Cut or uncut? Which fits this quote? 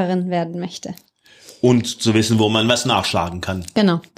uncut